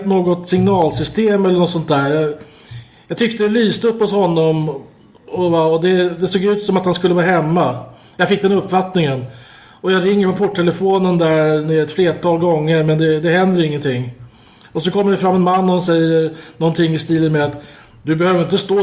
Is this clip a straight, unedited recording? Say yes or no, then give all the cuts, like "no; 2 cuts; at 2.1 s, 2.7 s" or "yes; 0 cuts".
yes; 0 cuts